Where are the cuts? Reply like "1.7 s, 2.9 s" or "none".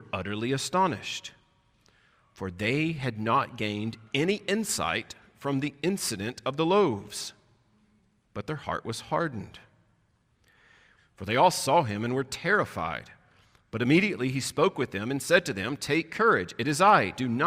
11.0 s

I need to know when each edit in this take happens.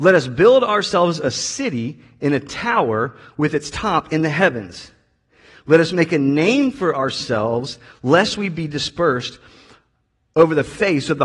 none

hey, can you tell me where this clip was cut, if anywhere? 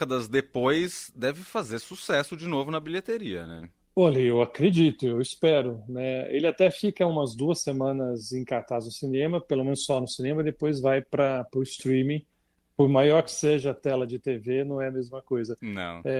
3.8 s, 12.3 s

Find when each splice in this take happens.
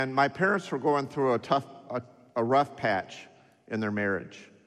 none

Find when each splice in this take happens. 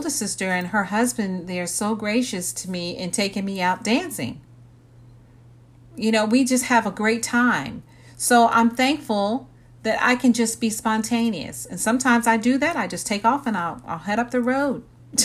none

